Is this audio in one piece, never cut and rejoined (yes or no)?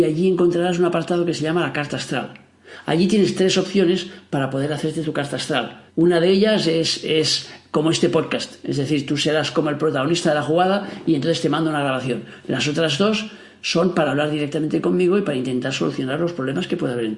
no